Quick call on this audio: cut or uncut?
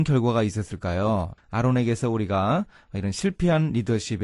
cut